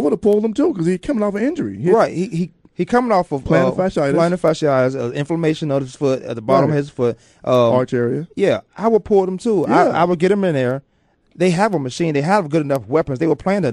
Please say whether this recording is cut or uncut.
uncut